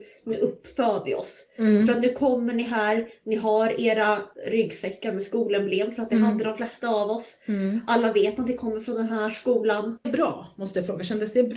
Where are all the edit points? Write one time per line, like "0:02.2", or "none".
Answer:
0:10.0